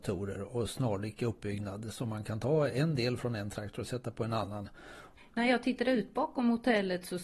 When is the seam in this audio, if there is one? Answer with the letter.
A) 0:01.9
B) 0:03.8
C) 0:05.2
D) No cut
C